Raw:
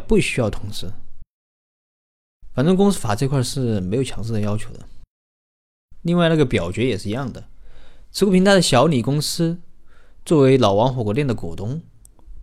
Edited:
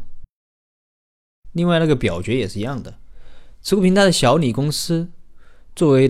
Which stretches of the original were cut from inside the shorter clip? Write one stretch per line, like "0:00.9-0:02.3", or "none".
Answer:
0:02.5-0:06.0